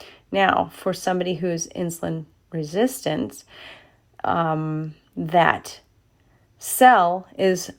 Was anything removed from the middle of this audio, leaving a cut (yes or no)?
no